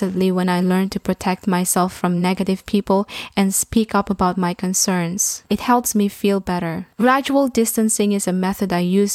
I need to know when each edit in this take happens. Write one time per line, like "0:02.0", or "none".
none